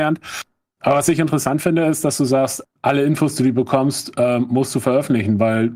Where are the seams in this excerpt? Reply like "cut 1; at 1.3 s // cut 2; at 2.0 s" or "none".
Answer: cut 1; at 2.6 s